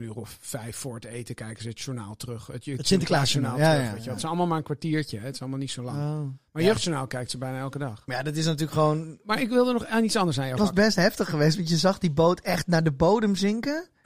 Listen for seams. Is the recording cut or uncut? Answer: cut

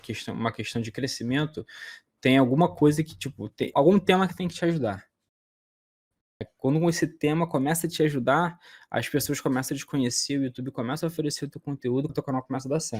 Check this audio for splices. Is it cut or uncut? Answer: cut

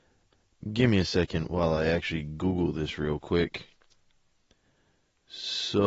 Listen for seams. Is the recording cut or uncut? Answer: uncut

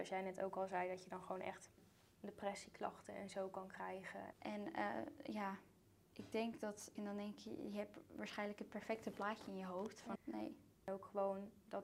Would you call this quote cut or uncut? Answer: cut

